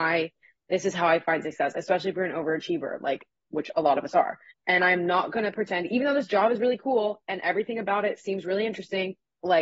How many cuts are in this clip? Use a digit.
1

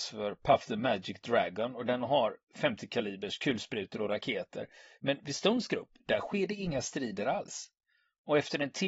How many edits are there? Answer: 1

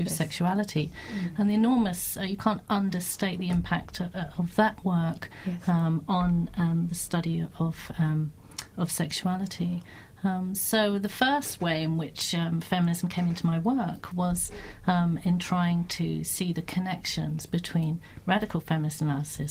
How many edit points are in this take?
0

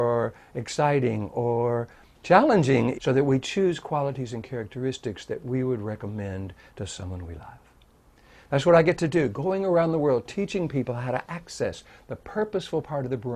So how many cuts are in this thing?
1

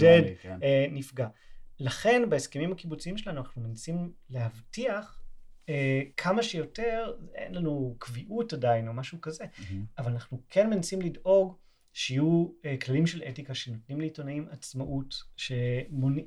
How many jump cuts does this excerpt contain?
1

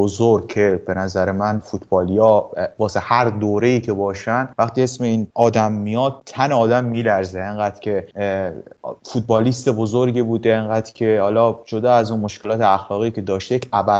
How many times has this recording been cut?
0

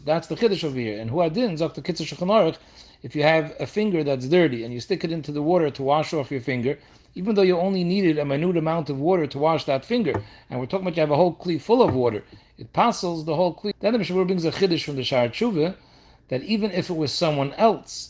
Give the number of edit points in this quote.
1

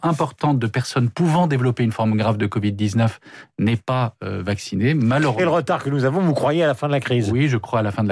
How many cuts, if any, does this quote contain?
1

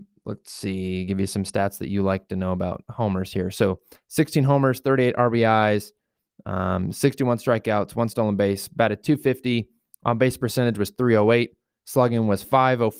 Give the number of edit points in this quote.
0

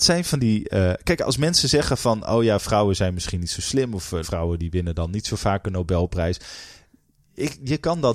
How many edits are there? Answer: 1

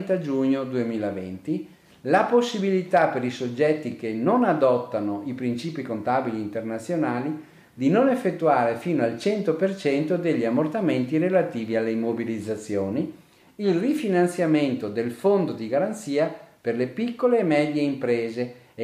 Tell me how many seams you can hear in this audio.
0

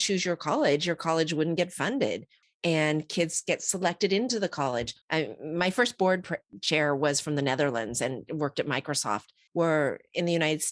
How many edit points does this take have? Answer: 3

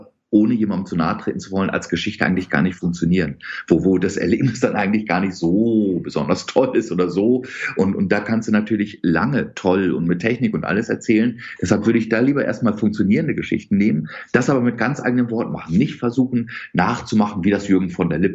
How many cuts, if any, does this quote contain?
1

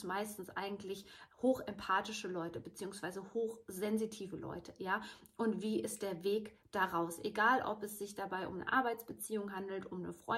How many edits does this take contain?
0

